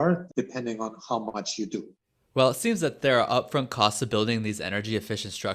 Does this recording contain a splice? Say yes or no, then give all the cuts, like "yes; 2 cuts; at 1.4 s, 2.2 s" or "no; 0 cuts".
no; 0 cuts